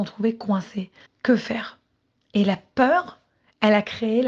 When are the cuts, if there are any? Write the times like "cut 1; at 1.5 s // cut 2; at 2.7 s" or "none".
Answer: cut 1; at 1.0 s